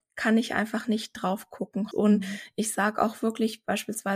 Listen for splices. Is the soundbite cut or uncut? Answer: cut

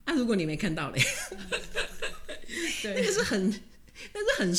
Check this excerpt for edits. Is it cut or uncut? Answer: uncut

